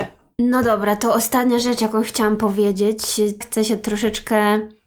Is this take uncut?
no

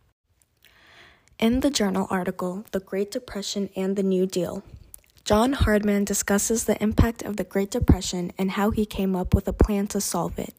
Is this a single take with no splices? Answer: yes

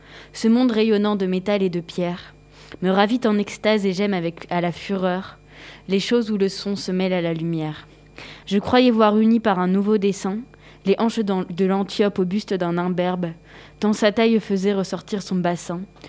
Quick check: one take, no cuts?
no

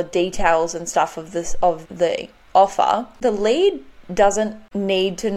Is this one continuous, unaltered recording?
no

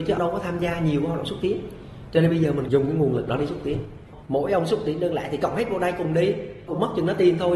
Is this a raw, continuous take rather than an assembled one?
yes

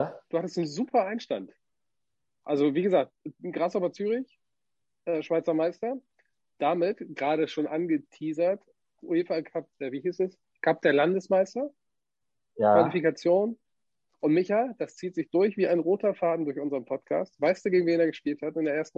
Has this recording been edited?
no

